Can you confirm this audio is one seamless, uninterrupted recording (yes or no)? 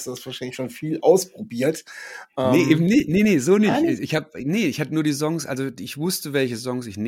yes